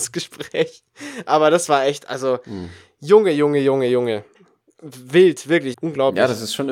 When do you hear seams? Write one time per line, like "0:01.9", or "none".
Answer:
0:05.7